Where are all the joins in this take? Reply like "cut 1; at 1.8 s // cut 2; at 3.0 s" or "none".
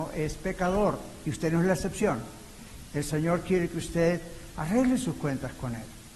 cut 1; at 2.9 s